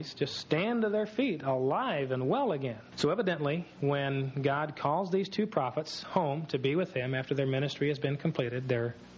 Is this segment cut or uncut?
cut